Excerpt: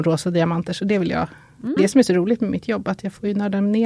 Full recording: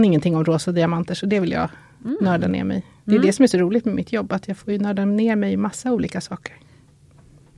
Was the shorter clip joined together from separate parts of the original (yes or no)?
yes